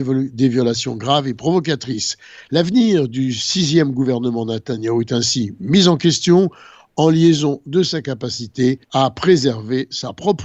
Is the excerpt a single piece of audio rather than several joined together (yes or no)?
no